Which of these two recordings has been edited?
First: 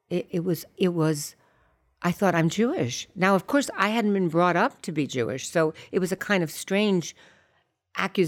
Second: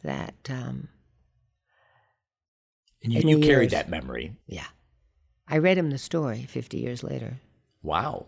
second; 2 cuts; at 3.2 s, 4.4 s

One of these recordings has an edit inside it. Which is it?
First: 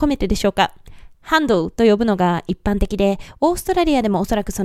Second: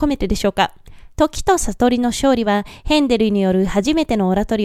second; 1 cut; at 1.1 s

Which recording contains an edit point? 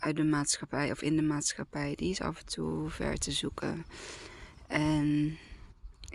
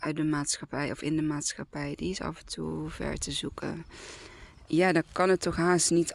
second; 1 cut; at 4.7 s

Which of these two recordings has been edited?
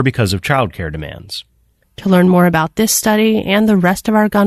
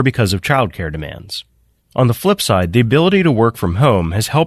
first; 1 cut; at 1.8 s

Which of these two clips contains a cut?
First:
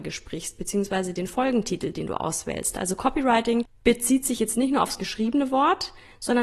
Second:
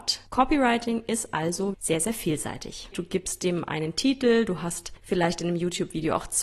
second; 2 cuts; at 1.7 s, 2.9 s

